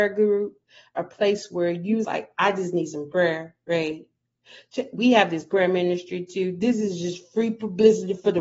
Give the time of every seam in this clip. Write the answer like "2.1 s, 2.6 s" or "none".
2.0 s